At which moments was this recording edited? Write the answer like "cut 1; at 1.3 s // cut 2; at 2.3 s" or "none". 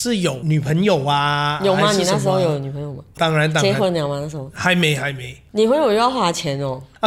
cut 1; at 3.2 s